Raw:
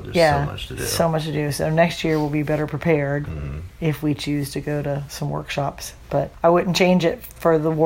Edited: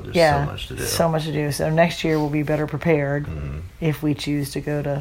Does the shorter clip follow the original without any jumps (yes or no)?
yes